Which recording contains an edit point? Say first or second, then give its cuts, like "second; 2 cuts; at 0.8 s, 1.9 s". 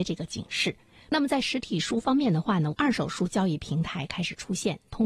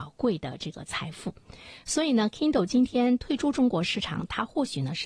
first; 2 cuts; at 1.0 s, 2.7 s